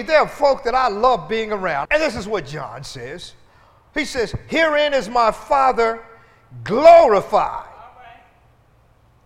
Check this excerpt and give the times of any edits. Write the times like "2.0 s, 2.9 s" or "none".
1.8 s

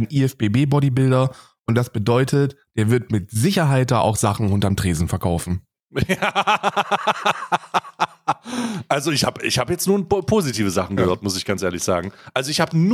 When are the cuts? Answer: none

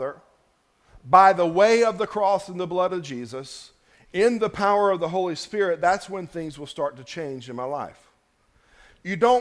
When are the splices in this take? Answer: none

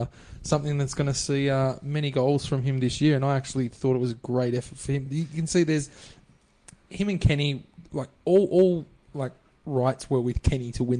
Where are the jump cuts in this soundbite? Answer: none

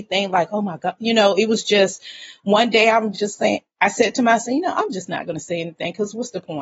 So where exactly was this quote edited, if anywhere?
none

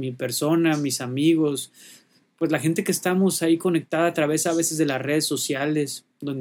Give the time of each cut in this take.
none

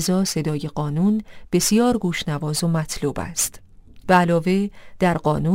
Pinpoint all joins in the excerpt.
4.0 s

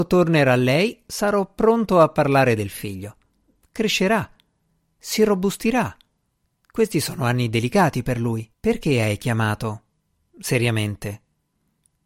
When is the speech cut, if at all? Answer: 3.6 s, 8.5 s

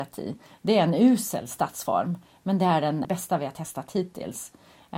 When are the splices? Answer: 3.0 s

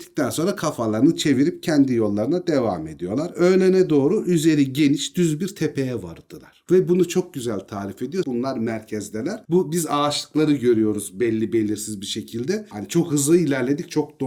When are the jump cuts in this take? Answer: 8.2 s, 9.4 s

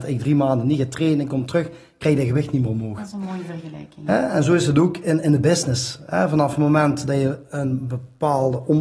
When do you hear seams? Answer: none

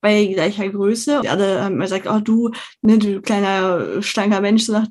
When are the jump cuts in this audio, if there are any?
1.2 s

